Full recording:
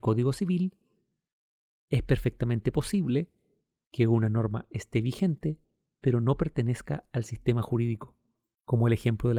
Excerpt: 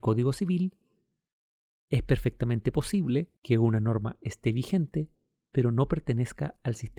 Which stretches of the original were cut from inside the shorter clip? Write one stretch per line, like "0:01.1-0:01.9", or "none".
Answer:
0:03.4-0:03.9